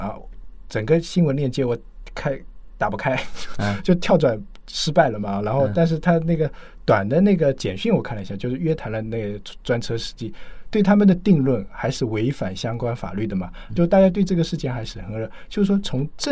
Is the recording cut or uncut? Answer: cut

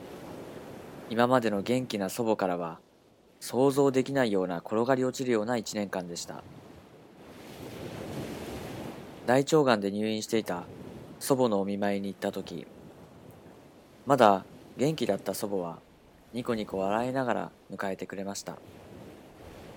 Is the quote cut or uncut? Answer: uncut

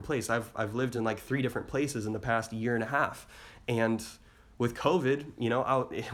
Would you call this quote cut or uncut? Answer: uncut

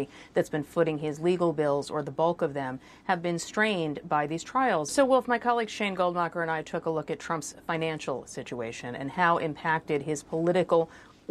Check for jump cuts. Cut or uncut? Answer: cut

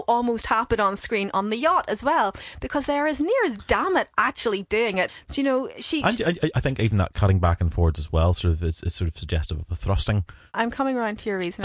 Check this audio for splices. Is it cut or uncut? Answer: cut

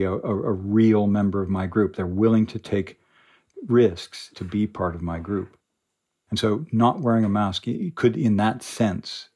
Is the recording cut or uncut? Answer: uncut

